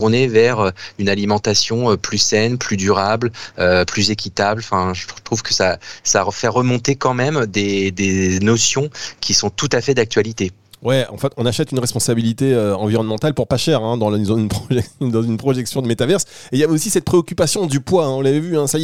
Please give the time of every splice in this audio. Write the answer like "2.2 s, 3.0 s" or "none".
none